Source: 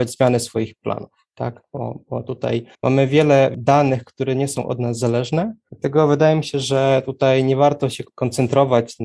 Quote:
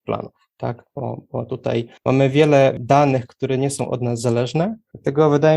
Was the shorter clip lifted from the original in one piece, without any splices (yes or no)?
yes